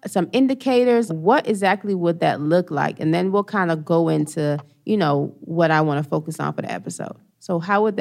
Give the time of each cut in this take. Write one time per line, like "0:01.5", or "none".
0:01.1